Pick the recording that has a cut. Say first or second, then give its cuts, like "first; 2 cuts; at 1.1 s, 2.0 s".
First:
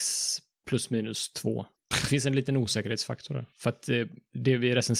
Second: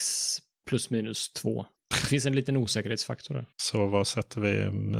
second; 1 cut; at 3.5 s